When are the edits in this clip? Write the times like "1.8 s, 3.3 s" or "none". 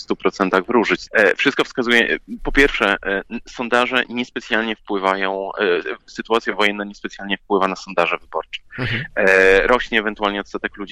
1.1 s

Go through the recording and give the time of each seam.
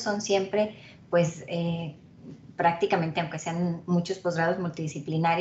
none

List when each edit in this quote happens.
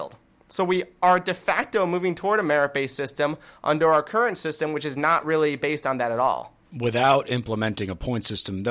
none

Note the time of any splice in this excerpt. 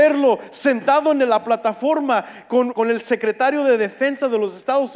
2.7 s

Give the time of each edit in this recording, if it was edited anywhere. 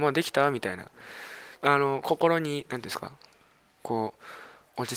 1.6 s

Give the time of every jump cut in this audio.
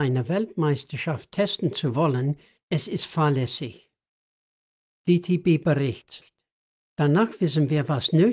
2.6 s

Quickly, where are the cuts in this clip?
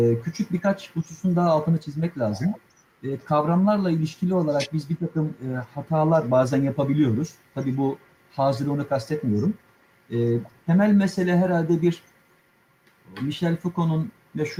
none

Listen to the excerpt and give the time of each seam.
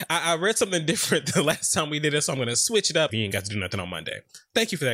3.1 s

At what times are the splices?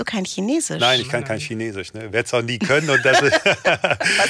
none

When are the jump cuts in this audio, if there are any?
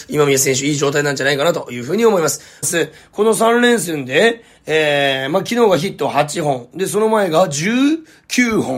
2.6 s

